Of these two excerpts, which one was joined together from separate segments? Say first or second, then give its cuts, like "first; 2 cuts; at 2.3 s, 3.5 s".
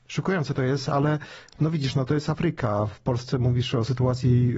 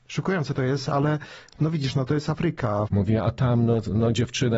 second; 1 cut; at 2.9 s